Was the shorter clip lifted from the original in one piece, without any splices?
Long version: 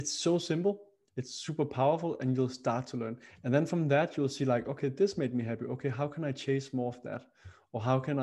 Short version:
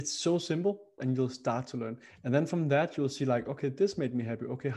no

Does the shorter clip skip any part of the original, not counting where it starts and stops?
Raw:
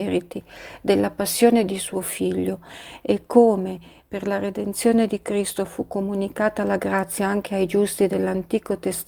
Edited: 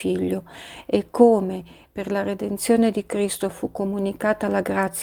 no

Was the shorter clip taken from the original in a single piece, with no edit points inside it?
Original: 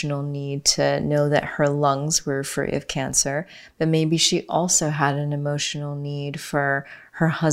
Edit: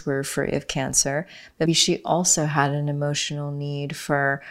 no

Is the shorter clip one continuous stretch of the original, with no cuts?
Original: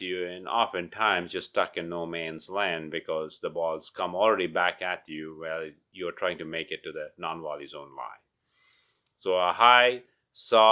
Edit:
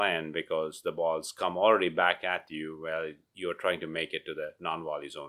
yes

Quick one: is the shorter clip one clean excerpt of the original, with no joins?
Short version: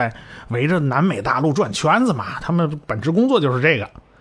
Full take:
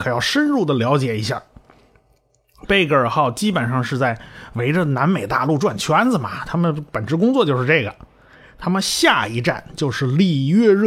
yes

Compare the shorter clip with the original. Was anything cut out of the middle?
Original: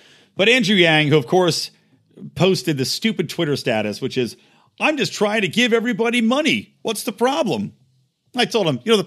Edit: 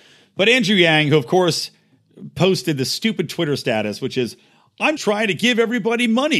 yes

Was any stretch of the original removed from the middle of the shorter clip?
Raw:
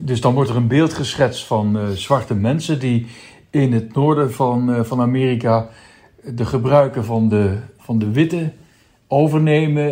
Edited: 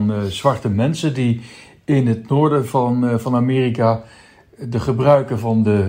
no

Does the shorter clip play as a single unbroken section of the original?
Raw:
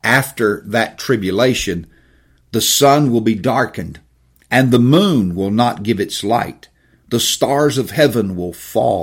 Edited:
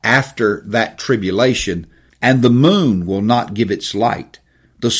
no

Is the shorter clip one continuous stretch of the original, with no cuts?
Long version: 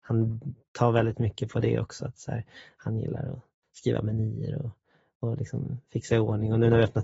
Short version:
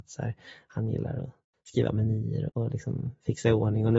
no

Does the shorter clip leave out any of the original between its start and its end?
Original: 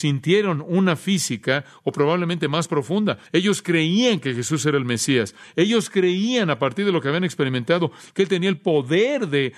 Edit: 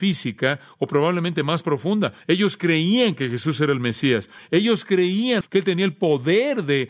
yes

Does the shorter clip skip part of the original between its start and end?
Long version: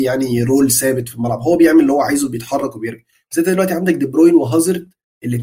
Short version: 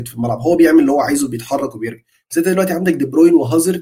no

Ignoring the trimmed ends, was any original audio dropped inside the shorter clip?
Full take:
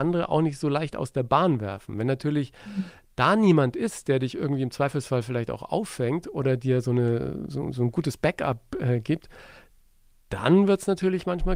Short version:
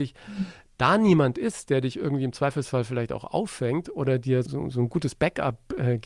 yes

